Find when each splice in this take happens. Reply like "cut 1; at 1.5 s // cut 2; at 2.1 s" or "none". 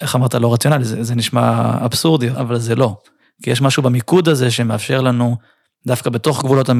cut 1; at 2.3 s